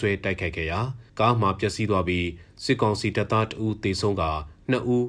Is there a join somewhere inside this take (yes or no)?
yes